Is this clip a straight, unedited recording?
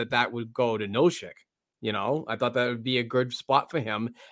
yes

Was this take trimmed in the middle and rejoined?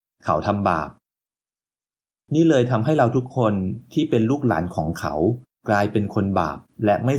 no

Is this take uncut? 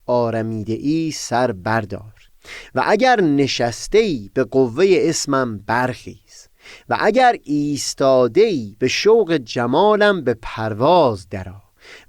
yes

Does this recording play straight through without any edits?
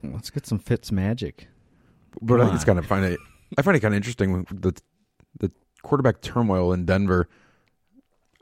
yes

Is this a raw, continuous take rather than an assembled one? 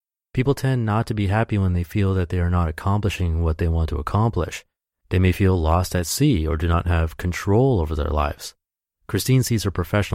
yes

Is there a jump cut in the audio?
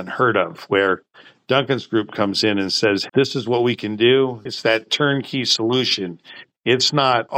yes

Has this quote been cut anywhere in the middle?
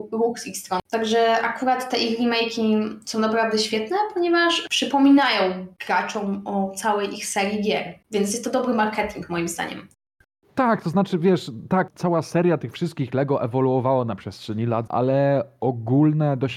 yes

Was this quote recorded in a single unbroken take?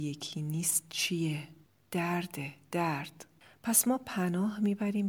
yes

